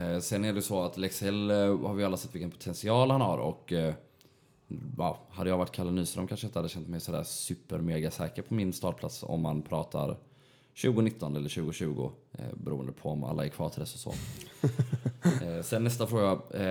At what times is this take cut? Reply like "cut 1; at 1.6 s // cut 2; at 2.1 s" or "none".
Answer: none